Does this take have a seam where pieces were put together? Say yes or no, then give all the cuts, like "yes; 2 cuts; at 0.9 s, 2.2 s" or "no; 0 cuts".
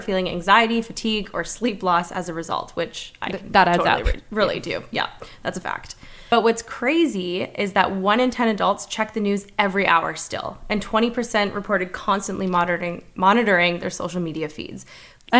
no; 0 cuts